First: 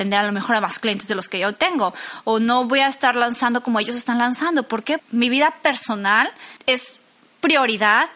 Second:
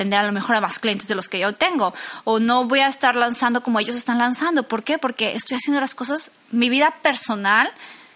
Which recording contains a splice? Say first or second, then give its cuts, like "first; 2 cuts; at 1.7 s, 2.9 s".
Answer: first; 2 cuts; at 5.0 s, 6.6 s